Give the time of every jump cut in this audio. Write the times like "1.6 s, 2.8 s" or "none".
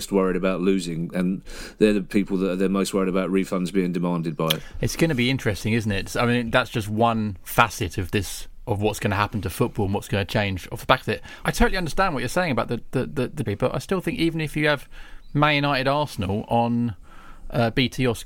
11.4 s, 13.5 s